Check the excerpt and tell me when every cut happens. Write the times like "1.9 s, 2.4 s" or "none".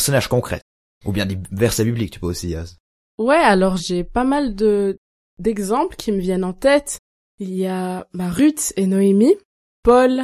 3.8 s